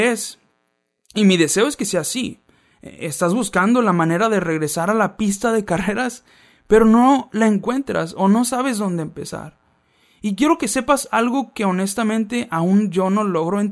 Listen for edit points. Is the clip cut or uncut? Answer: uncut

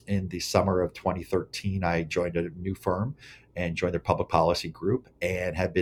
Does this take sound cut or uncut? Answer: uncut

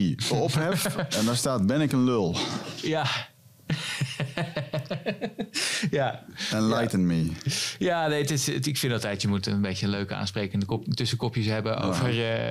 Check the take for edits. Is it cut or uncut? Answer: uncut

